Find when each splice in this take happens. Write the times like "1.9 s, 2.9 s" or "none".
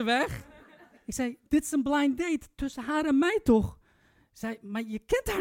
0.9 s